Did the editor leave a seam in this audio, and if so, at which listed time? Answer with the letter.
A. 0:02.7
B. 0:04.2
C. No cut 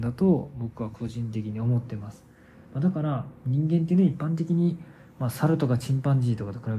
C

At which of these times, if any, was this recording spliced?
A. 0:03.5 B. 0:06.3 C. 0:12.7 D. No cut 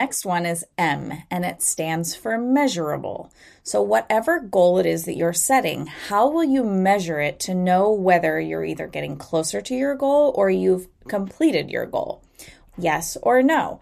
C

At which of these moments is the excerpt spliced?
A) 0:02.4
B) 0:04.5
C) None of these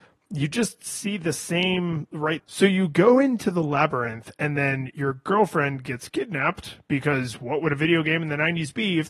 A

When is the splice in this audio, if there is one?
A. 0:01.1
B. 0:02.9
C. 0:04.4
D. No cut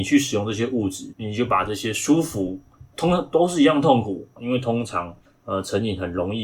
C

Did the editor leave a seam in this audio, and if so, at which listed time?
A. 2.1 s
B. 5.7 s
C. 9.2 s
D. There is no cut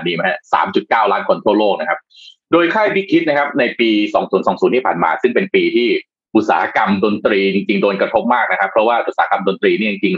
D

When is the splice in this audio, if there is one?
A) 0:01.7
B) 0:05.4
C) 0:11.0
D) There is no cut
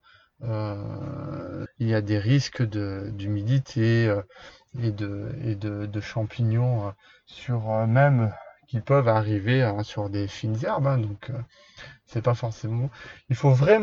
A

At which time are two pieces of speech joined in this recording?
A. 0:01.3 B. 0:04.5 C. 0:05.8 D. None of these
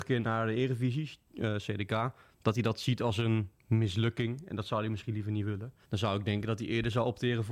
C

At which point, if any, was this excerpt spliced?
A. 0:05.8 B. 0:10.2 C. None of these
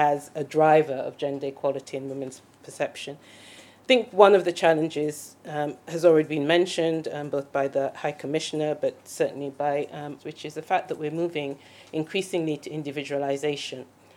B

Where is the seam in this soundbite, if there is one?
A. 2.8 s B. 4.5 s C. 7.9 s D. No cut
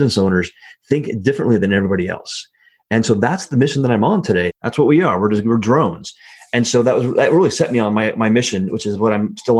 B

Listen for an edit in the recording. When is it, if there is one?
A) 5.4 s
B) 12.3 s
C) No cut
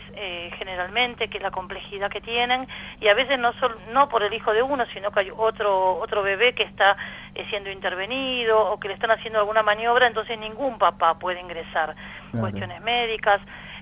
B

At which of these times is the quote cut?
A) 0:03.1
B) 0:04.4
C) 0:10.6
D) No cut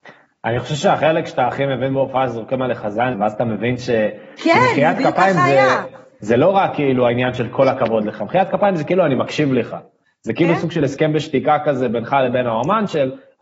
A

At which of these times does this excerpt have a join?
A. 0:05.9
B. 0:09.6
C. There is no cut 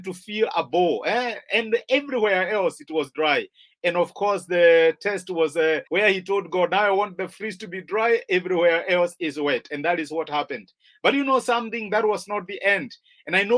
A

